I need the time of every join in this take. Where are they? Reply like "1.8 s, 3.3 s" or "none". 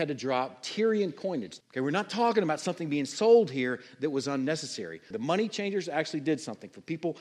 1.6 s, 5.1 s